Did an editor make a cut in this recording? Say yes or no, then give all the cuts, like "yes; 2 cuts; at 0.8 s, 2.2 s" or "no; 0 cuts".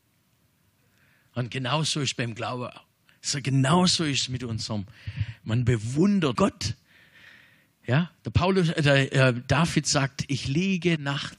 yes; 1 cut; at 6.4 s